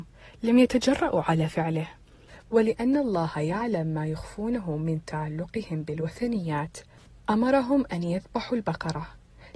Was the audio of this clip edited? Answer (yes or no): yes